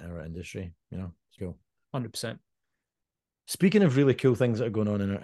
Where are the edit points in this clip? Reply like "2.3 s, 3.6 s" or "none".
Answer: 1.4 s